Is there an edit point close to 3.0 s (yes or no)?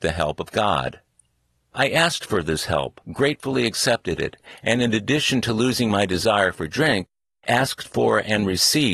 yes